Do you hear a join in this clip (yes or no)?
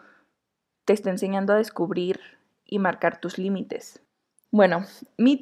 yes